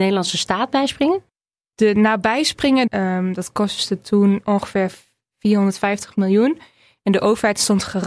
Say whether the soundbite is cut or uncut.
cut